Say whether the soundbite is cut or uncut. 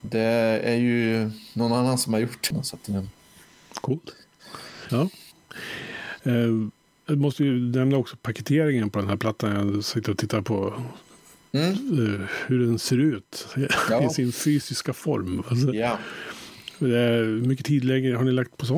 cut